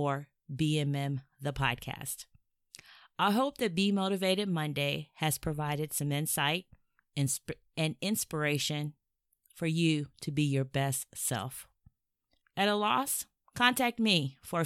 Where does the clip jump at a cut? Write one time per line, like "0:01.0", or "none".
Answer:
0:07.7
0:12.4